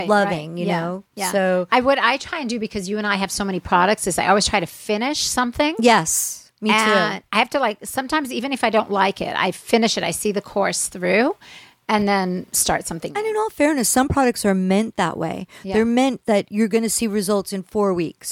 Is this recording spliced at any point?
no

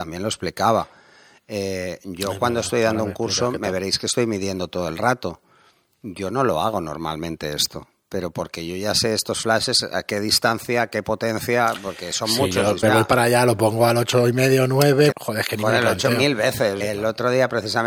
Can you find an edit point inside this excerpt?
yes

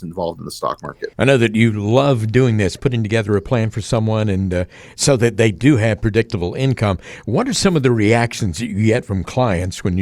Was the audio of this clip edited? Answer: no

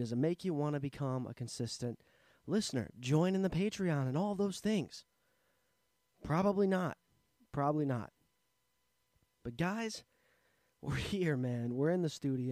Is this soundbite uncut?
yes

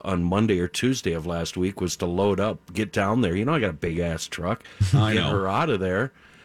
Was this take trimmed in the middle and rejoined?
no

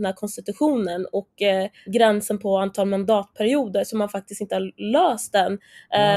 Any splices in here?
yes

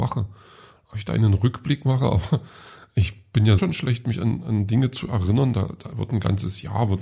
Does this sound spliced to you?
yes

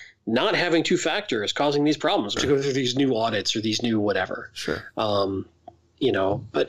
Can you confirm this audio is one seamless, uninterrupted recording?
no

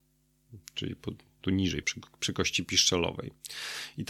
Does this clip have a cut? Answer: yes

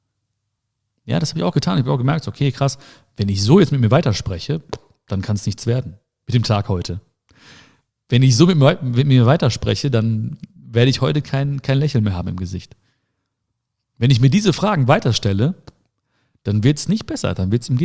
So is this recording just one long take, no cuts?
yes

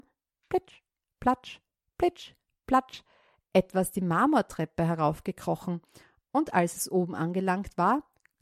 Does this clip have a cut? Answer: no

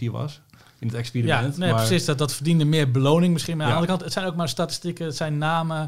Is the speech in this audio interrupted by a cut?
no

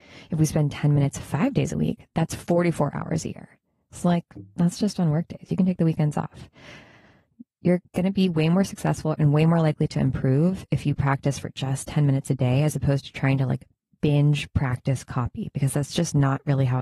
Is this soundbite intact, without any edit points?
yes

